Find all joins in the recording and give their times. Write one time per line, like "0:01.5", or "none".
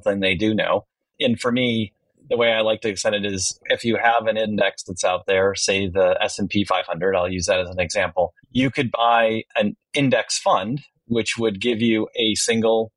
0:08.4